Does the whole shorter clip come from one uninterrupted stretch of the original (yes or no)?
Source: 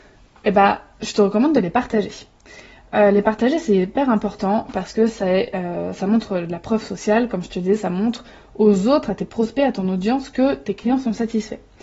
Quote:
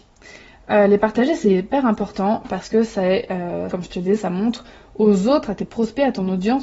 no